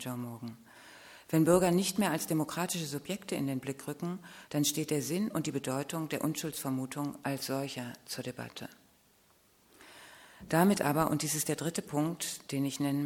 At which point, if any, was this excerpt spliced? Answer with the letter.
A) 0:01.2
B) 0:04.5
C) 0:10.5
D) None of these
B